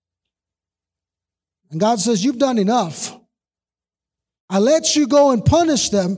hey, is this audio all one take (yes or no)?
yes